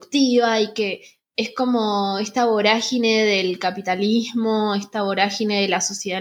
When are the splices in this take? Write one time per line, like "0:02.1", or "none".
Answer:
none